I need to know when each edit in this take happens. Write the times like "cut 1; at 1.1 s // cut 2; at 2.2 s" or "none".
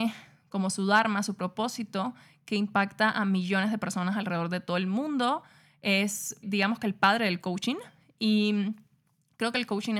cut 1; at 6.4 s